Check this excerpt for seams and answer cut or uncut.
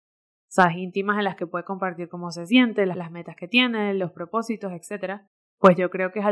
cut